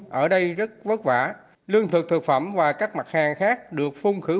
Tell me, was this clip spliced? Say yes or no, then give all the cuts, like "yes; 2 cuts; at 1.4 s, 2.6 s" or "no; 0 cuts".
no; 0 cuts